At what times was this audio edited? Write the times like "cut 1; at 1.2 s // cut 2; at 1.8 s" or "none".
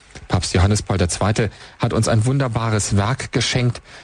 none